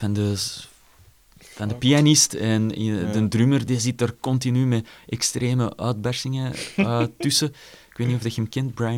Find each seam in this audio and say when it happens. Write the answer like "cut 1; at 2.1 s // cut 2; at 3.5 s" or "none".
none